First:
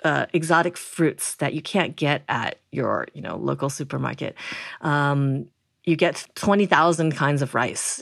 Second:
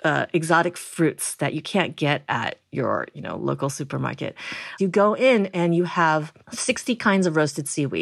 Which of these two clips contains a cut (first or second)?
second